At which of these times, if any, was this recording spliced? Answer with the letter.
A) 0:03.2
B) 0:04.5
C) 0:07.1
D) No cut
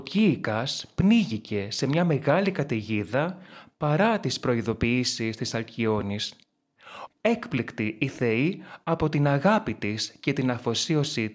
C